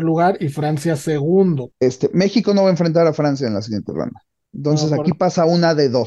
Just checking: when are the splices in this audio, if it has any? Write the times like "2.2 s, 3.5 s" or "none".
1.7 s